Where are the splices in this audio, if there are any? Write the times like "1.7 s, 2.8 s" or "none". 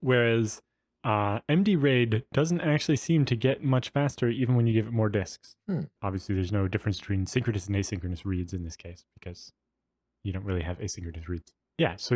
6.0 s